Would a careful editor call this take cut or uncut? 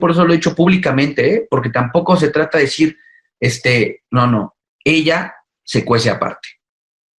uncut